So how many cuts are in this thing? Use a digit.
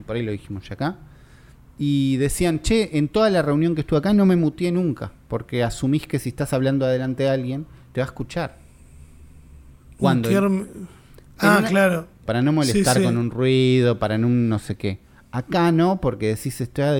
1